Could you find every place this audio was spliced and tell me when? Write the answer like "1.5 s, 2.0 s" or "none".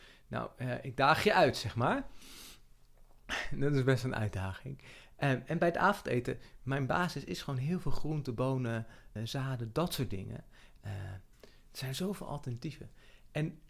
9.2 s, 10.8 s

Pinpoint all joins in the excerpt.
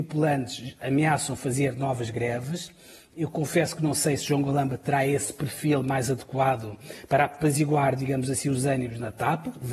none

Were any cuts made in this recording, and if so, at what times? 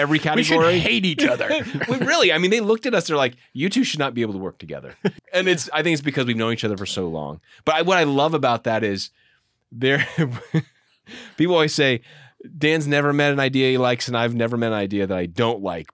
5.2 s

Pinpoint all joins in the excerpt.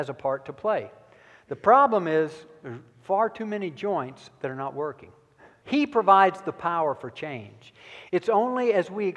5.6 s, 8.1 s

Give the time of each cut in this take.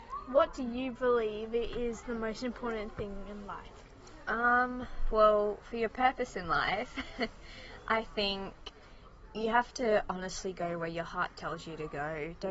none

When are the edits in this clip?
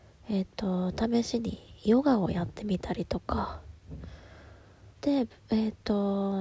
4.9 s

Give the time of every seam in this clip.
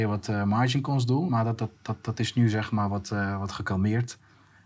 none

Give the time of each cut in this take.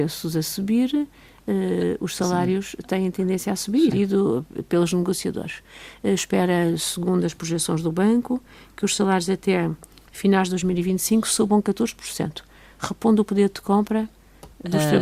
3.9 s

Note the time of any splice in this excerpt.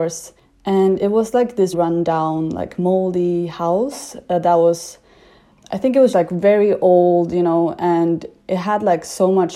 1.7 s, 6.1 s

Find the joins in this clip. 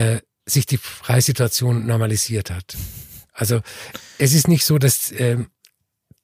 none

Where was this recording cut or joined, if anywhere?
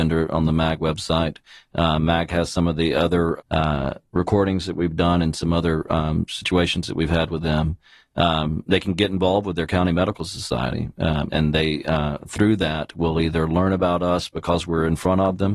3.4 s, 11.3 s

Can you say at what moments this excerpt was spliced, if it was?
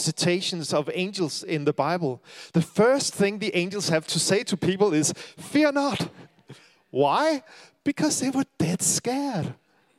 none

